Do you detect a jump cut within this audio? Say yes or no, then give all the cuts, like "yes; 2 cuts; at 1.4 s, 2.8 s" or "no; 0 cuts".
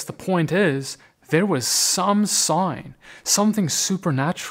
no; 0 cuts